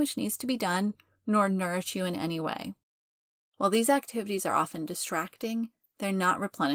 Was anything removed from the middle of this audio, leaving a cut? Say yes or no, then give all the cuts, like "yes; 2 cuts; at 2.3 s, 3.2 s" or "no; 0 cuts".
yes; 1 cut; at 3.4 s